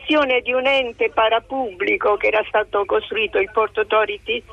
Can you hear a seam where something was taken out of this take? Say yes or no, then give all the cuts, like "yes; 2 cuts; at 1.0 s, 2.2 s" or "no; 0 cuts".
no; 0 cuts